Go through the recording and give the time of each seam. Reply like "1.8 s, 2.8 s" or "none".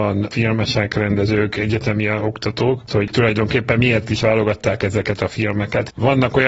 2.9 s